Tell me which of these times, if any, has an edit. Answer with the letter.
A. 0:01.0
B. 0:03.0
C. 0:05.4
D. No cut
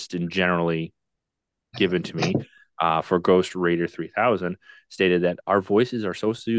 C